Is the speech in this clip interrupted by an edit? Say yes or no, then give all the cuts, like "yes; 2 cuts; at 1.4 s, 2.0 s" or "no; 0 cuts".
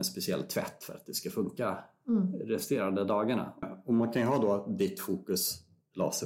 yes; 1 cut; at 3.6 s